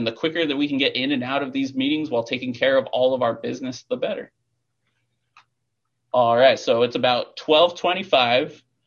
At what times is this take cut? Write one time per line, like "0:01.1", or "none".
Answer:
none